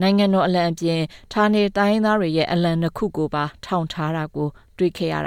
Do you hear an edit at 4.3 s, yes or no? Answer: no